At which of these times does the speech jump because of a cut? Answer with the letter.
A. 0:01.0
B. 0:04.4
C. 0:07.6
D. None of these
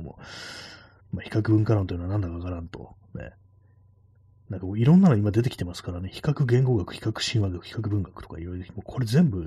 A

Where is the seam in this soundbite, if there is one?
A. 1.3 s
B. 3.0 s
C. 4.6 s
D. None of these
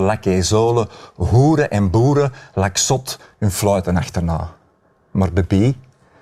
D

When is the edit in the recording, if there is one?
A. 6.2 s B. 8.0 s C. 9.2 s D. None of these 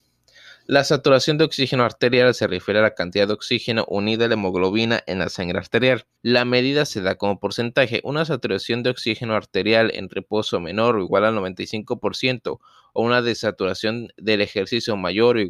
A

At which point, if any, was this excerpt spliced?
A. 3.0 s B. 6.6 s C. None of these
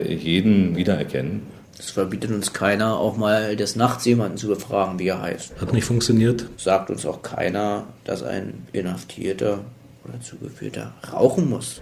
C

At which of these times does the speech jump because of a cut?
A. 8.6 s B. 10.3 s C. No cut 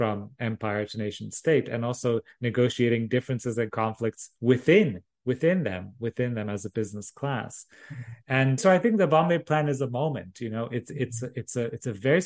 A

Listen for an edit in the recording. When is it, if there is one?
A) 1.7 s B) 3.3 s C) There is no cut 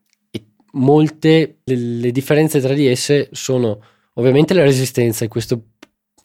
A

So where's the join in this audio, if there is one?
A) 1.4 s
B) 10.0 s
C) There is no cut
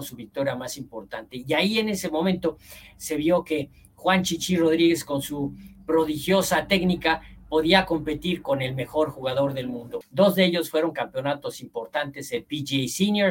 B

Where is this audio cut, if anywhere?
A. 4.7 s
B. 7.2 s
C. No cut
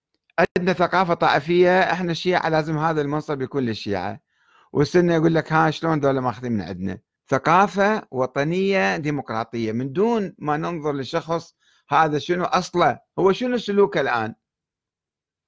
B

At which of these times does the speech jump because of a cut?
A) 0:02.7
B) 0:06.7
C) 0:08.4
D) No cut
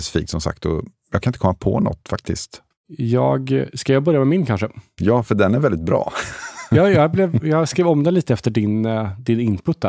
A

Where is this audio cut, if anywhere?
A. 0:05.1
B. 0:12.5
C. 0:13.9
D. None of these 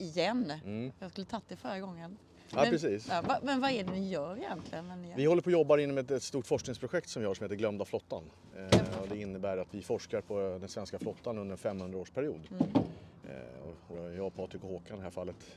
C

